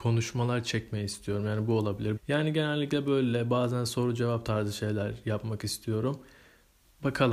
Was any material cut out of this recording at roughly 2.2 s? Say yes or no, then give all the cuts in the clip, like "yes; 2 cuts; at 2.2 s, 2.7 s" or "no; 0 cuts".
yes; 1 cut; at 2.2 s